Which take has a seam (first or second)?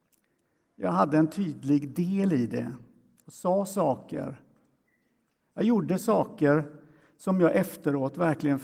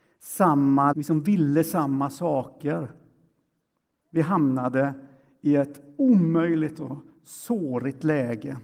second